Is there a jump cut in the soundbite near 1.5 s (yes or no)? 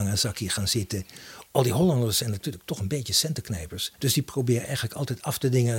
yes